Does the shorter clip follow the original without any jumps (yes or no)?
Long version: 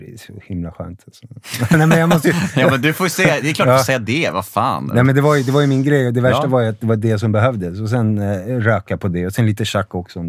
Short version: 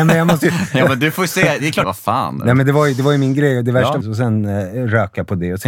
no